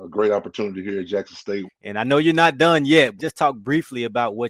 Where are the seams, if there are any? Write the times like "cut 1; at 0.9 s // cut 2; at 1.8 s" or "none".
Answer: cut 1; at 1.7 s // cut 2; at 3.2 s